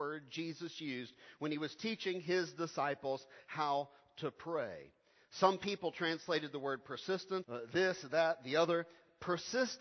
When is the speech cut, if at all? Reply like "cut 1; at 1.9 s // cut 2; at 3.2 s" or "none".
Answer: cut 1; at 7.4 s